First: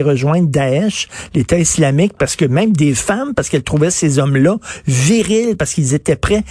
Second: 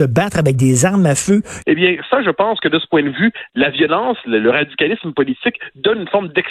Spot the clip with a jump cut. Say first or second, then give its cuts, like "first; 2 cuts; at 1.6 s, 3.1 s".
second; 1 cut; at 1.6 s